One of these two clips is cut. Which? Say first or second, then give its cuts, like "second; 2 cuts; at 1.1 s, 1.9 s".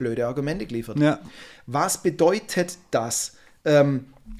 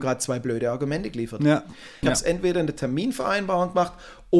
second; 1 cut; at 2.0 s